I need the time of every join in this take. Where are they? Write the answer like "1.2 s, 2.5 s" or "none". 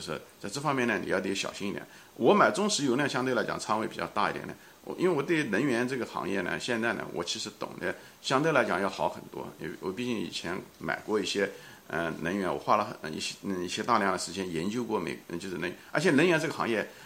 none